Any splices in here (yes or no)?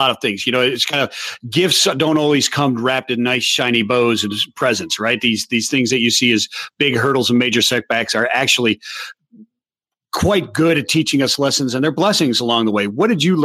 no